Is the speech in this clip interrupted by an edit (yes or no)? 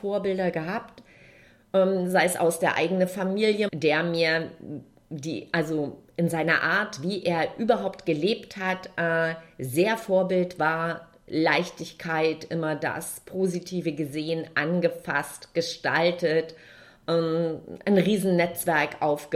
yes